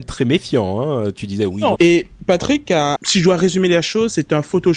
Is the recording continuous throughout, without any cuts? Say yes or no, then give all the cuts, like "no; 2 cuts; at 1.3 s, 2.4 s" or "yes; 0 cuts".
no; 2 cuts; at 1.8 s, 3.0 s